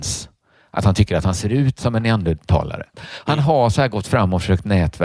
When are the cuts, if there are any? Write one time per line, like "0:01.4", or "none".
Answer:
0:02.9

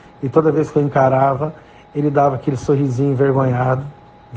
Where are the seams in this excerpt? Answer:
none

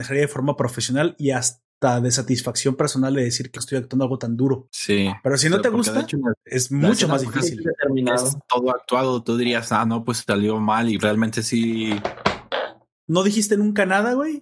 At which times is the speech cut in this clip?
0:03.5
0:11.0
0:13.0

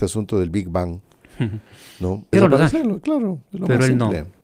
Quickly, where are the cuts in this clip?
0:02.3

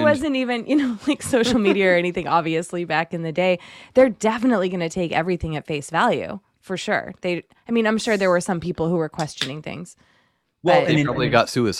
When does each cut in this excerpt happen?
none

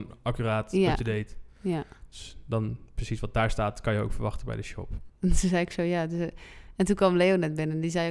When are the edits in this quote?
0:05.1

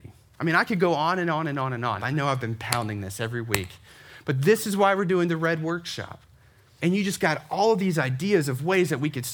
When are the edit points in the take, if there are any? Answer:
0:02.0
0:06.8

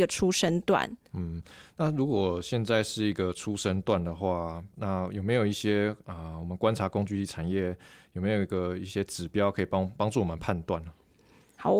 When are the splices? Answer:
none

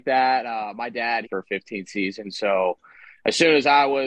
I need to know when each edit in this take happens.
0:01.3

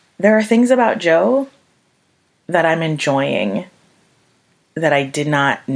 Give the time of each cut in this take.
none

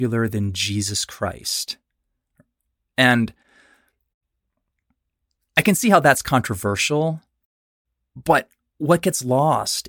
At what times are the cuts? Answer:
none

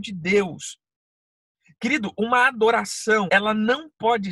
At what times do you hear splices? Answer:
0:03.3

